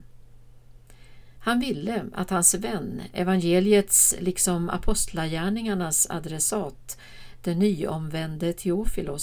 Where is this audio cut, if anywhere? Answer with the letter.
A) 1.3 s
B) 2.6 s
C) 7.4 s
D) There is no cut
A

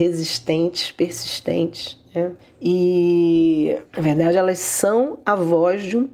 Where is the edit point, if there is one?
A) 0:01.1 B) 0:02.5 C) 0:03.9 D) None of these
D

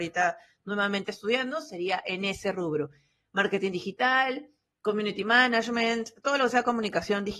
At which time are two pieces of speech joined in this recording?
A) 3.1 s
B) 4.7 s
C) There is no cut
C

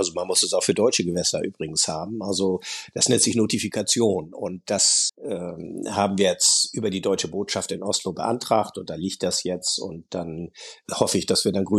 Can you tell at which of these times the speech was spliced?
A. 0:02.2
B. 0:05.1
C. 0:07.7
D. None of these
B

